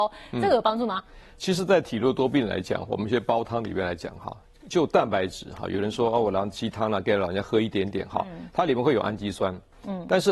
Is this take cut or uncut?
uncut